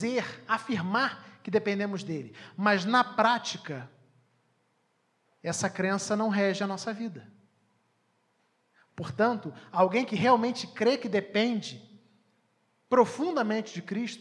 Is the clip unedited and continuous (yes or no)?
yes